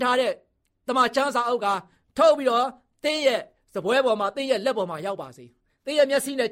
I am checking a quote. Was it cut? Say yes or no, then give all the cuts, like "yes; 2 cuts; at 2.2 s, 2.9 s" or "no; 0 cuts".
no; 0 cuts